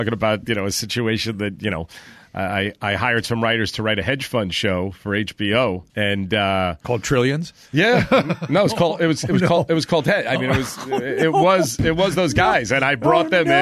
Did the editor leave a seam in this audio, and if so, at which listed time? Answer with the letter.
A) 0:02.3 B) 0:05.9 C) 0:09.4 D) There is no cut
B